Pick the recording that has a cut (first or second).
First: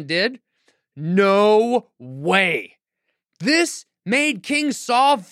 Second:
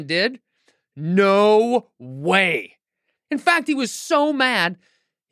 second